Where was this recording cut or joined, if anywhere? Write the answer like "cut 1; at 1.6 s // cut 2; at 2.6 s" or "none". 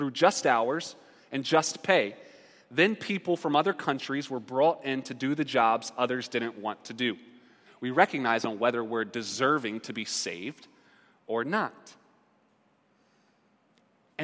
cut 1; at 7.7 s